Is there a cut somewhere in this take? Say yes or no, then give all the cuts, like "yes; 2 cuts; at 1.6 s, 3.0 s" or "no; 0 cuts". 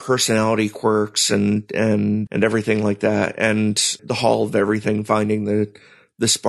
yes; 2 cuts; at 2.3 s, 4.0 s